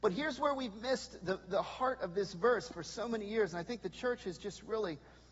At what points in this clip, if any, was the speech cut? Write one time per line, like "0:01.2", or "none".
none